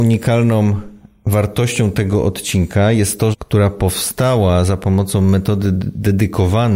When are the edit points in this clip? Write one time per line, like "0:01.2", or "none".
0:03.3